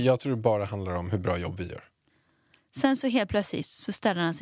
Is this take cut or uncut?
cut